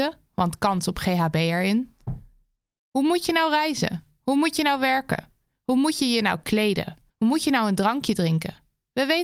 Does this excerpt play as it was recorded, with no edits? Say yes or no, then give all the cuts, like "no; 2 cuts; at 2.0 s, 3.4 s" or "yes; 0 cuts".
no; 1 cut; at 7.1 s